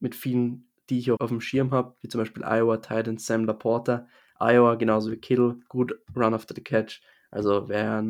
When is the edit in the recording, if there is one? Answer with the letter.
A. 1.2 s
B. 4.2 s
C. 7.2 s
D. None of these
A